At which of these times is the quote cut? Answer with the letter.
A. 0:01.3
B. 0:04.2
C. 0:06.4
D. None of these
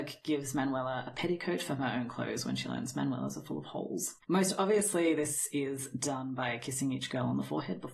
B